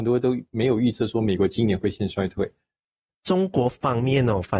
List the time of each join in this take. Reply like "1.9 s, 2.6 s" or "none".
3.1 s